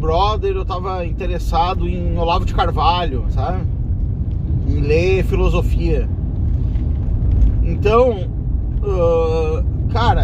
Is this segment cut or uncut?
uncut